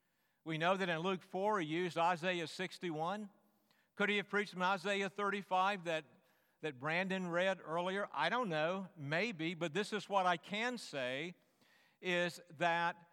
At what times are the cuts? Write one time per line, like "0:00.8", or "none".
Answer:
none